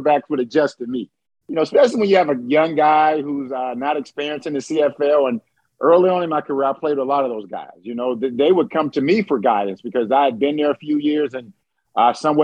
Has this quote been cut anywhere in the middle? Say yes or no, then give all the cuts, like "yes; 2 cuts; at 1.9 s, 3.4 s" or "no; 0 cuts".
no; 0 cuts